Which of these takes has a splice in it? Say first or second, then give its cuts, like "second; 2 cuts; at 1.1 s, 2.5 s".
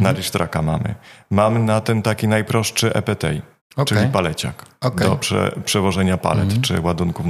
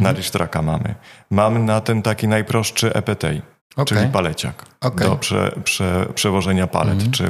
first; 1 cut; at 5.6 s